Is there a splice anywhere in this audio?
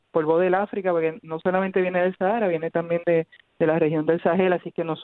no; 0 cuts

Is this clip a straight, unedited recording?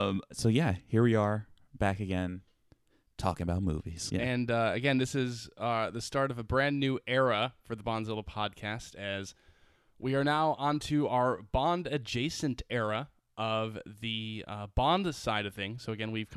no; 1 cut; at 4.1 s

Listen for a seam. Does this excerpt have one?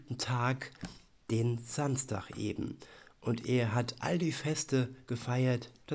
no; 0 cuts

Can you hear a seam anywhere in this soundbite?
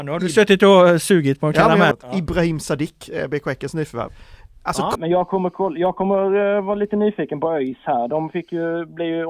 yes; 2 cuts; at 1.9 s, 5.0 s

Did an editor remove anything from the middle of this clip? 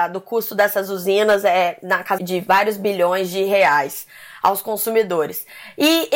yes; 1 cut; at 2.2 s

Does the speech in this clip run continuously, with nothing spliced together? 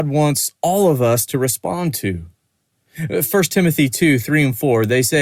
yes; 0 cuts

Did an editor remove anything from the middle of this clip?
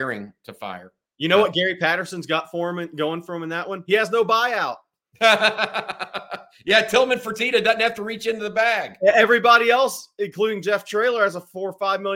no; 0 cuts

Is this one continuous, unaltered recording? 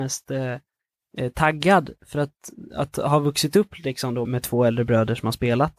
no; 1 cut; at 4.3 s

